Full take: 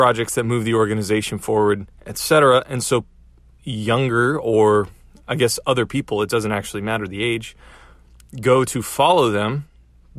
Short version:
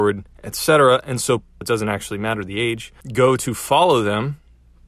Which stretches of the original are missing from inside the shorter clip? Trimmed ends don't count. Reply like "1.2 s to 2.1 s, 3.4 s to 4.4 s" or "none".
3.2 s to 6.2 s, 7.6 s to 8.3 s